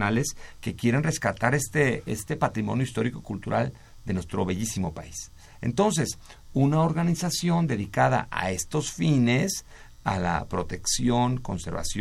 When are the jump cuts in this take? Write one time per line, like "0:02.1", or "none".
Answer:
none